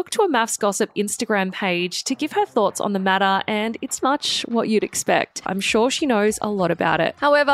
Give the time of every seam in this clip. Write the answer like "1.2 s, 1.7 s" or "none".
4.0 s, 5.4 s